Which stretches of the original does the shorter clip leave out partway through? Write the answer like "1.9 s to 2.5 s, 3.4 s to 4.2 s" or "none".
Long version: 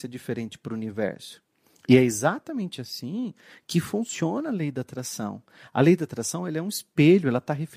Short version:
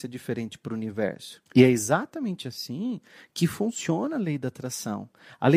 1.5 s to 1.8 s